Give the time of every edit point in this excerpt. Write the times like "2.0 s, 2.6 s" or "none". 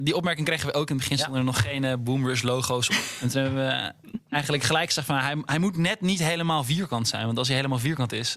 none

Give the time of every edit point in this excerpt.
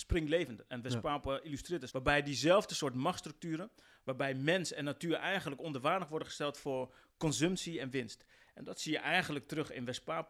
1.9 s

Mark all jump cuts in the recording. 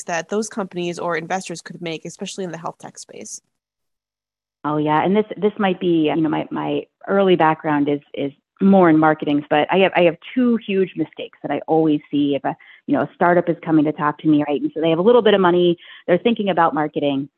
6.1 s, 9.4 s, 14.4 s

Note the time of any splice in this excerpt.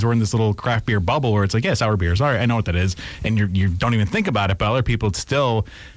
none

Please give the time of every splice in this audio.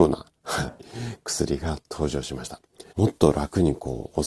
2.9 s

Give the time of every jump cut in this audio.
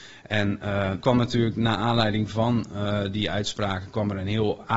1.0 s

